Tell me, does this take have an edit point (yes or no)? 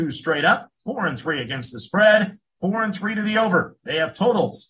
no